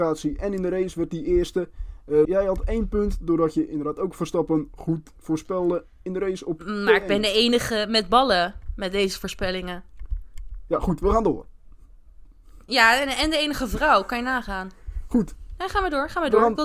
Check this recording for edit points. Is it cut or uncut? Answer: cut